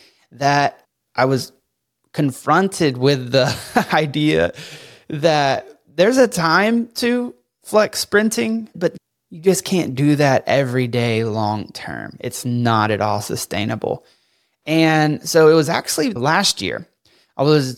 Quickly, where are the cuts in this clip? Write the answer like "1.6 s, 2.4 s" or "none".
none